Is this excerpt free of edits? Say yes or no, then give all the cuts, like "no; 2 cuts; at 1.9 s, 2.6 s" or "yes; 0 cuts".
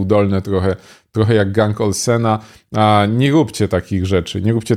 yes; 0 cuts